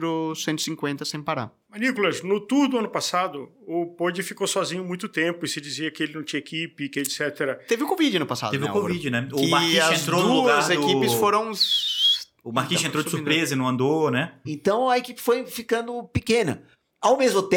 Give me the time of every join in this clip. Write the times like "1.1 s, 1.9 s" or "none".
14.4 s